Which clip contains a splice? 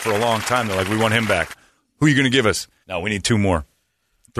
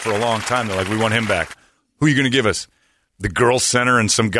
first; 1 cut; at 2.8 s

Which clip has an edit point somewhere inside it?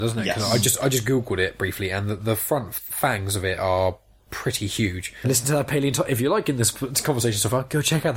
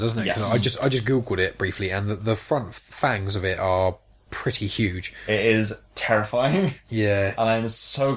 first; 1 cut; at 5.2 s

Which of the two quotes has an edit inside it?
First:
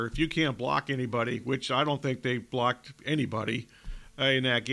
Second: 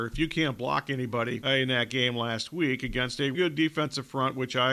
second; 2 cuts; at 1.4 s, 3.3 s

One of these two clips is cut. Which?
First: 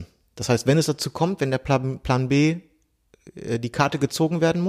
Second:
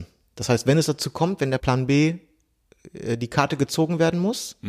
second; 1 cut; at 1.6 s

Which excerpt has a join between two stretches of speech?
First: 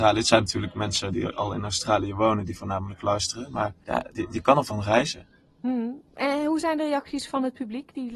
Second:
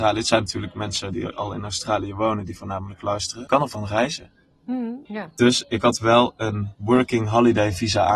second; 2 cuts; at 3.5 s, 5.1 s

